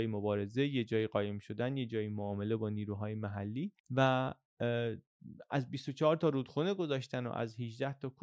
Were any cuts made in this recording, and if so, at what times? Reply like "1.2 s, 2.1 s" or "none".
3.8 s